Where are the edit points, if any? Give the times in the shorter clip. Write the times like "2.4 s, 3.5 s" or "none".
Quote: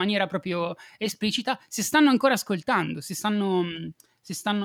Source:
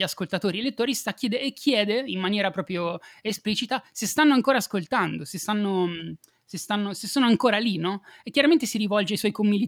none